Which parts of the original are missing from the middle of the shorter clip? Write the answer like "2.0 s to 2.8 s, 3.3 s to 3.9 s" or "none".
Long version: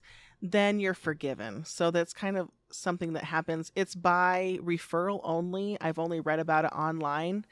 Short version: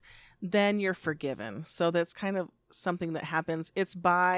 none

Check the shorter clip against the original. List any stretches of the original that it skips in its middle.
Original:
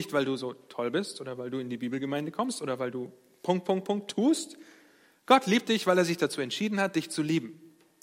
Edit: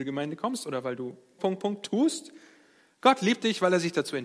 3.3 s to 3.6 s

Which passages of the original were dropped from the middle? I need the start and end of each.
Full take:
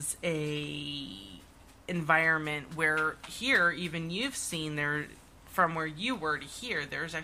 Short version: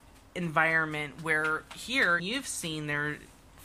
3.7 s to 4.1 s

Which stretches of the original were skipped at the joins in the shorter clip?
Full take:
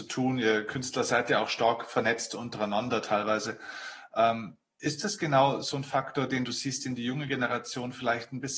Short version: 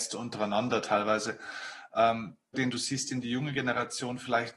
4.7 s to 6.3 s

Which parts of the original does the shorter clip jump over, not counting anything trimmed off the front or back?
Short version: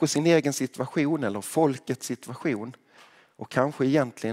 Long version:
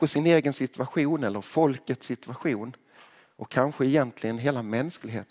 none

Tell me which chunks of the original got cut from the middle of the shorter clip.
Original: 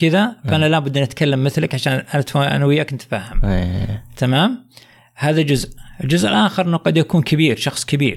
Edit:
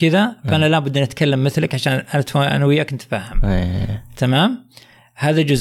none

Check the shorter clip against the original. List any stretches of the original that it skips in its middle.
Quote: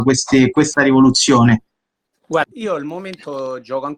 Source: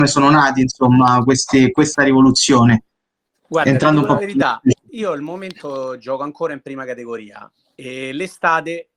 3.6 s to 4.8 s

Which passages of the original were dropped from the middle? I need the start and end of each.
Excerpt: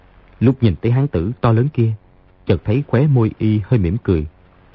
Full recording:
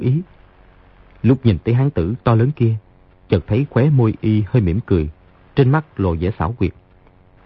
none

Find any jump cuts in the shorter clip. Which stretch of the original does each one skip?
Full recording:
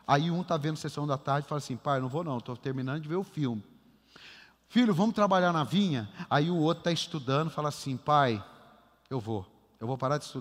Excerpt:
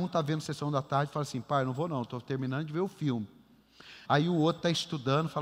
4.4 s to 6.3 s

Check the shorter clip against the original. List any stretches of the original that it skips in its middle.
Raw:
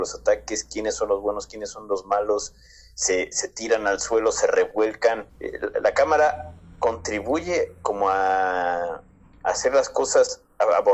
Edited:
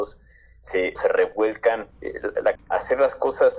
3.3 s to 4.3 s, 5.9 s to 9.3 s

